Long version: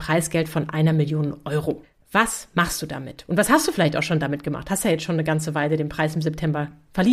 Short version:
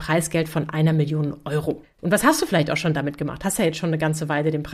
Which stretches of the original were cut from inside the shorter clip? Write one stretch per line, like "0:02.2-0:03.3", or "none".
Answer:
0:02.0-0:03.2